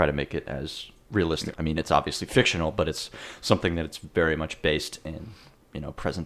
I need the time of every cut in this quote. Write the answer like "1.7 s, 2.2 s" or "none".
1.5 s